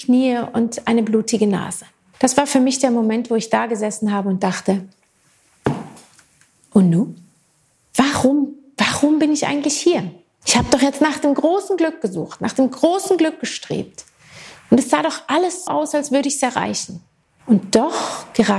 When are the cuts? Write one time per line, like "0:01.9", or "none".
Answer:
0:15.7